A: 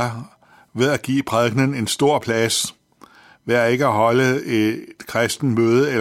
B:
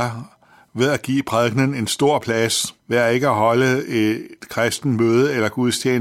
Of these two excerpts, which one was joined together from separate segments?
B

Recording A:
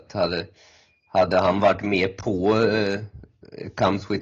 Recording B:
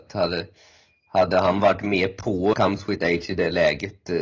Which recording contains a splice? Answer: B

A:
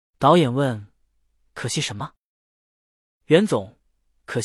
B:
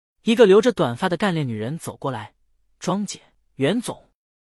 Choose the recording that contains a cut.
B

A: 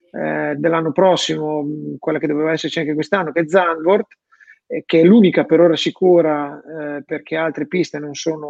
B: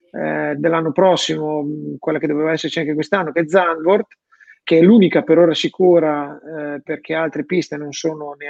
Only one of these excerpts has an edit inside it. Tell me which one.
B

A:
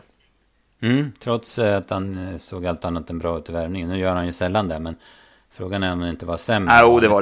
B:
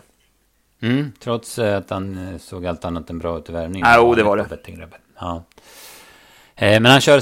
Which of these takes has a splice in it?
B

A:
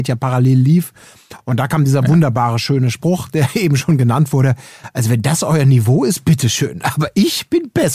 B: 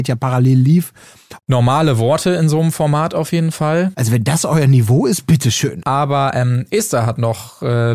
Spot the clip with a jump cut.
B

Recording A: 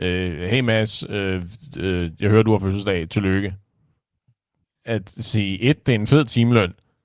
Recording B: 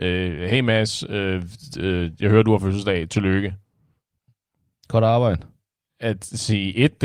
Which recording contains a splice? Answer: A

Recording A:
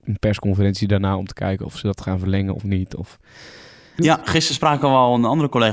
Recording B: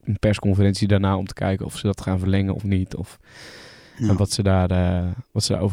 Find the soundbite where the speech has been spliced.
A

